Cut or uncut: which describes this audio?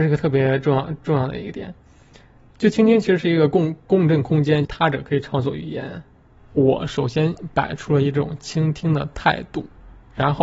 cut